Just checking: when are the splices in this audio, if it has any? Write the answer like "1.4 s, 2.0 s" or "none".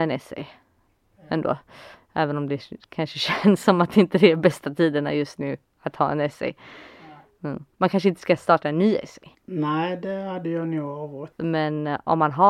7.7 s